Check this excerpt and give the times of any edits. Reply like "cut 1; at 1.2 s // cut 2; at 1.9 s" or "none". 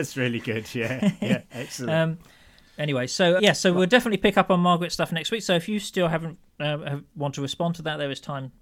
cut 1; at 3.4 s